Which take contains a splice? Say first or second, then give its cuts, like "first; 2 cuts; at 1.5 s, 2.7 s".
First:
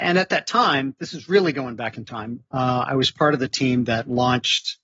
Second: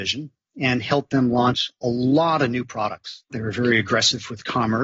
second; 1 cut; at 3.3 s